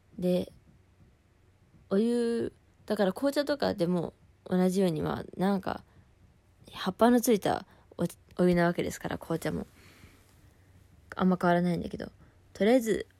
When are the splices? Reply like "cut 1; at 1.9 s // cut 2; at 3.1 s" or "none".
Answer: none